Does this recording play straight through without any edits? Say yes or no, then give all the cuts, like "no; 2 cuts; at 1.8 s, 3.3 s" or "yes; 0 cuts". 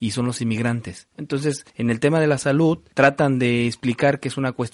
no; 1 cut; at 1.1 s